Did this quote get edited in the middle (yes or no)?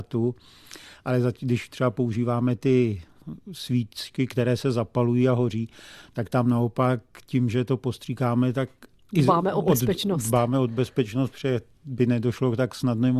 no